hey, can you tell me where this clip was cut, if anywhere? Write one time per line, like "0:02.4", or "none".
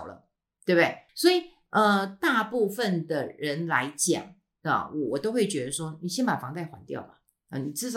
0:01.1